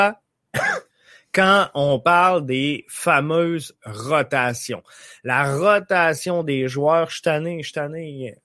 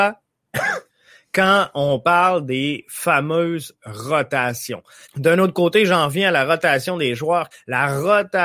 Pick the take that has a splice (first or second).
second